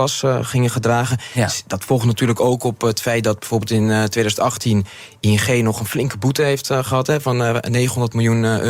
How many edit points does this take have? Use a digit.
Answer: 0